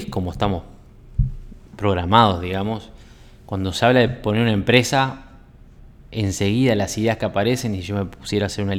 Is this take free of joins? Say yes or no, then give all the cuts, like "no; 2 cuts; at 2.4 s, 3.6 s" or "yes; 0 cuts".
yes; 0 cuts